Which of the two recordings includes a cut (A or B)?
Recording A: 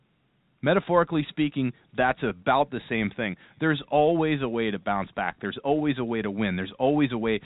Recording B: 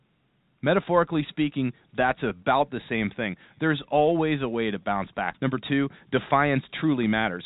B